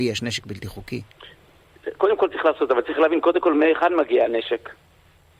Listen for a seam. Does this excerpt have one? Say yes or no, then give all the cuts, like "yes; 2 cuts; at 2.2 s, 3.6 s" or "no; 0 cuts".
no; 0 cuts